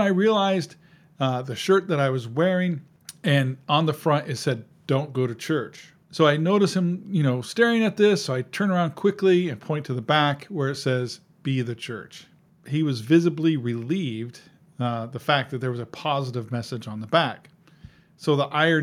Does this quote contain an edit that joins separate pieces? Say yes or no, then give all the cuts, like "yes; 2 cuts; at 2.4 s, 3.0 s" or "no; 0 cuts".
no; 0 cuts